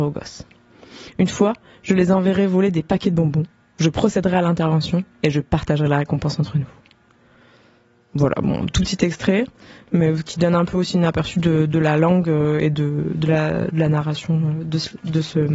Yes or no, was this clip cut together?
no